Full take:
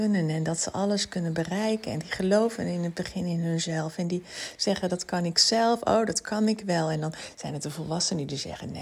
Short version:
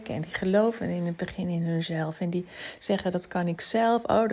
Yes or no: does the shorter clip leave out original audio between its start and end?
no